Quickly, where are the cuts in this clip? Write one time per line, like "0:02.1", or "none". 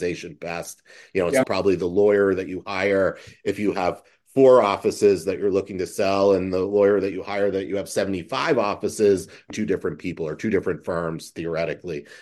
0:01.4
0:09.5